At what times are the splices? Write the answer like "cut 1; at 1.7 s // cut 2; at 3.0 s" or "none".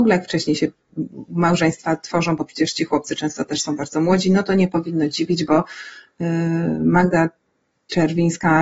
none